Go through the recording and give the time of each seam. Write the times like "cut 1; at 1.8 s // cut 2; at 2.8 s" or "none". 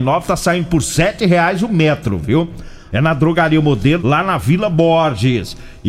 cut 1; at 2.9 s // cut 2; at 4.0 s